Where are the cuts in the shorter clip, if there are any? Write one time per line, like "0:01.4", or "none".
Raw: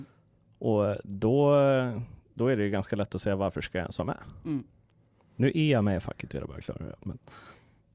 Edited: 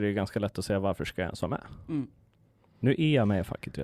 none